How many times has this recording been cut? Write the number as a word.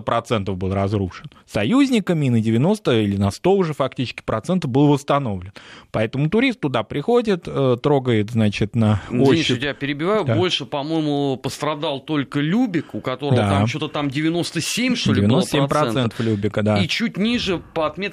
one